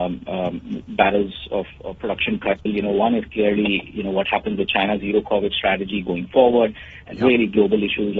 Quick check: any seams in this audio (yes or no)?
yes